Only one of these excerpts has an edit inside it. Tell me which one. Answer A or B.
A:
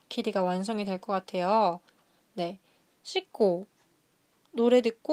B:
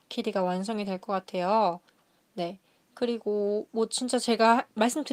A